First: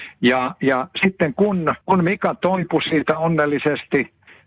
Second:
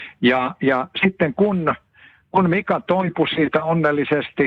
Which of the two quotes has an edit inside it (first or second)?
first